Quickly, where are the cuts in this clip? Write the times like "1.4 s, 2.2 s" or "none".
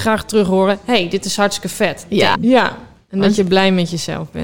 2.3 s